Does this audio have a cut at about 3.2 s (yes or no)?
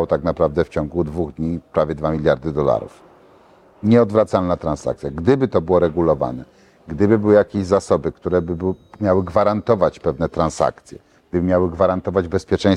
no